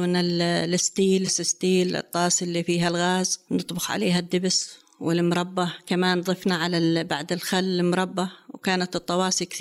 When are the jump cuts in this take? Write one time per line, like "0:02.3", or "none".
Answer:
0:01.3